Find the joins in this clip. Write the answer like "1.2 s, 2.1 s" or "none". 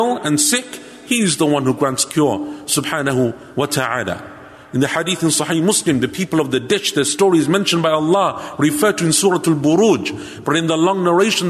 none